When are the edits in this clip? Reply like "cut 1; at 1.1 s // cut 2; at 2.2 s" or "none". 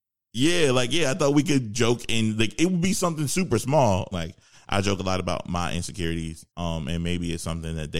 cut 1; at 4.1 s // cut 2; at 6.5 s